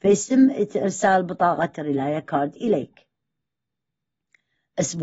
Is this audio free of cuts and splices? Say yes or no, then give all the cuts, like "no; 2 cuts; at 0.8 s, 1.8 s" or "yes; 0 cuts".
yes; 0 cuts